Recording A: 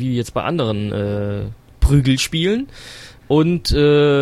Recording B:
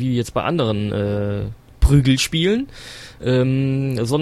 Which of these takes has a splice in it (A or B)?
A